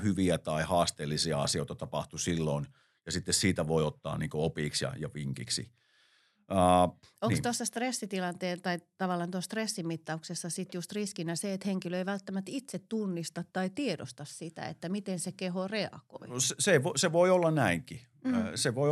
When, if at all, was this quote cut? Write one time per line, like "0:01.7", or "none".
none